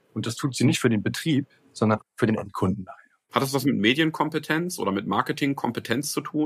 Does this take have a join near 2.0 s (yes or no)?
yes